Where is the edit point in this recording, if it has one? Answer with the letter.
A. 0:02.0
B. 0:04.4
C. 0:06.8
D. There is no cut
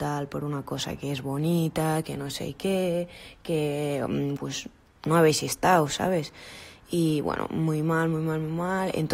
B